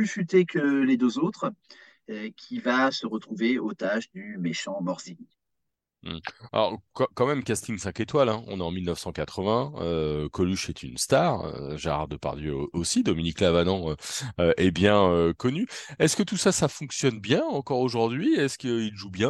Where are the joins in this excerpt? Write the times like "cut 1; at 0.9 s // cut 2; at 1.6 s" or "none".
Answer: none